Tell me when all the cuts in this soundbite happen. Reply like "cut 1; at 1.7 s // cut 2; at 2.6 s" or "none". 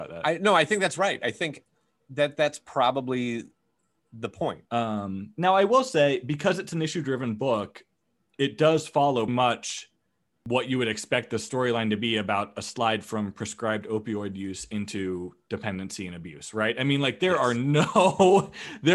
cut 1; at 4.7 s // cut 2; at 9.3 s